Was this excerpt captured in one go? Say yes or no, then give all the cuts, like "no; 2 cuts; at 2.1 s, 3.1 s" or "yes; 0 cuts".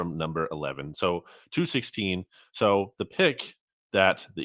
yes; 0 cuts